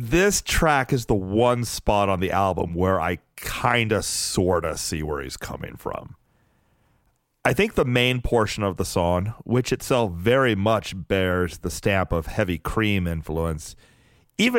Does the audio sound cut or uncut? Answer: uncut